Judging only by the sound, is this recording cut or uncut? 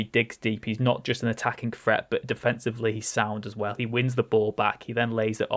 uncut